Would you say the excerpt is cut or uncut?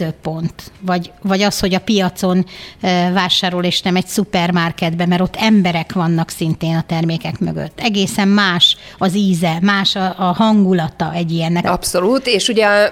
cut